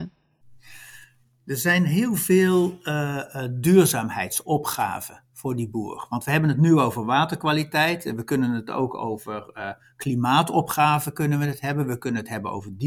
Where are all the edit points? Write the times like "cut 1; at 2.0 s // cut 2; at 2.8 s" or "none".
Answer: none